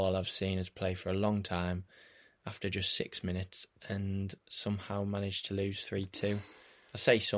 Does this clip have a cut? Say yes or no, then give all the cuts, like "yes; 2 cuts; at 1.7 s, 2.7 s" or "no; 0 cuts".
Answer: yes; 1 cut; at 4.4 s